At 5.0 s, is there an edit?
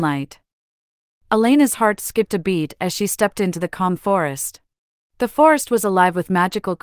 yes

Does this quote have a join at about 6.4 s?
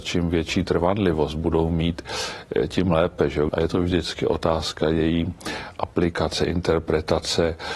no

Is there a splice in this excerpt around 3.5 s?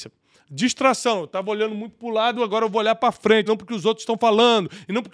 yes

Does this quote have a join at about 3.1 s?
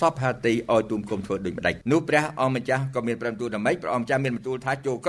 no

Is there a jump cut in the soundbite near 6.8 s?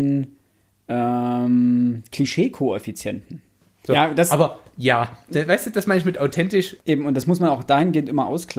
yes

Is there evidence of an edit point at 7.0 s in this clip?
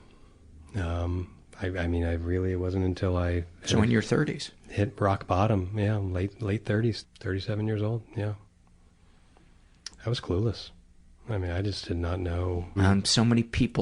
yes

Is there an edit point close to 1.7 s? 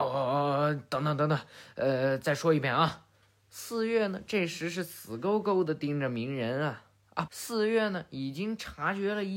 no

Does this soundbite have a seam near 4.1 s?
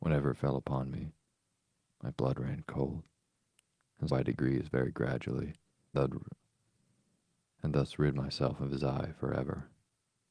yes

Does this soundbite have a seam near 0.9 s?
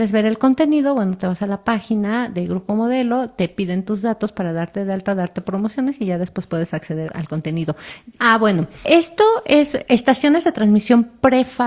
no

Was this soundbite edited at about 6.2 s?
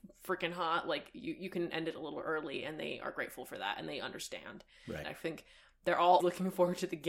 yes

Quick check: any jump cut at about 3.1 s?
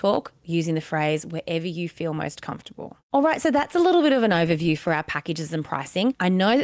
yes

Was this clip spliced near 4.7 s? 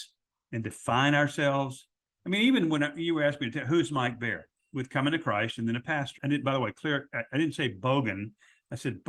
yes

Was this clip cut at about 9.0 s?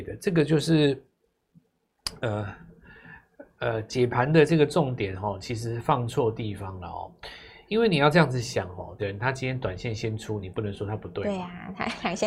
yes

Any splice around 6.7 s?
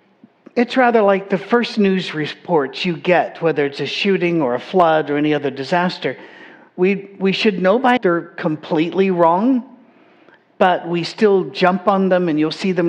no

